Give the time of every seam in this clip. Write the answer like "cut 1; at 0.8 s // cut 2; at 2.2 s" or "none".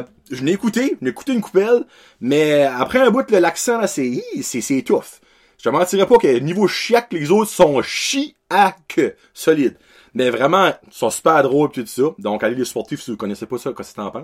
none